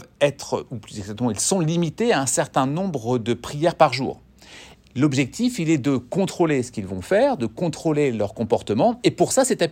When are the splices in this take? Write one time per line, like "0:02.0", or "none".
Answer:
0:04.7